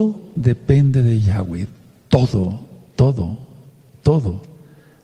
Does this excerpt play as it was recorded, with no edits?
yes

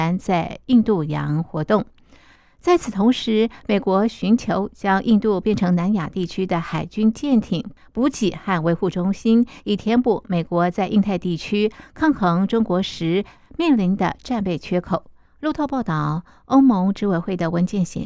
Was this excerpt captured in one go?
no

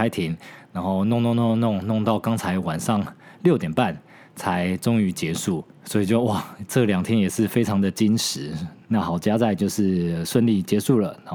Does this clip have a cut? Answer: yes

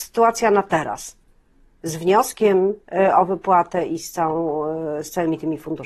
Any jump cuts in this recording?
no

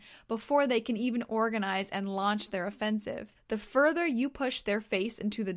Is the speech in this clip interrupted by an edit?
yes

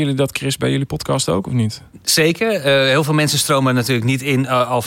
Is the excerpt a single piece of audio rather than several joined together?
yes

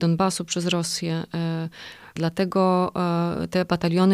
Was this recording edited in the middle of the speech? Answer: yes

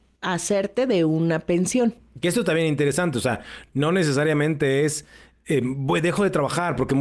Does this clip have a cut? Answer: no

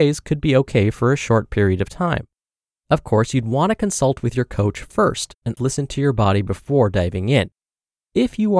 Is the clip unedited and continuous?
no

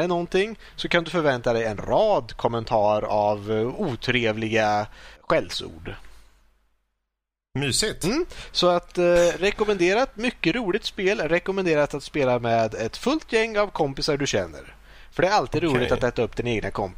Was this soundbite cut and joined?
yes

